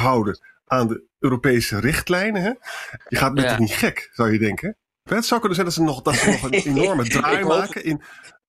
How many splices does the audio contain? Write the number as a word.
two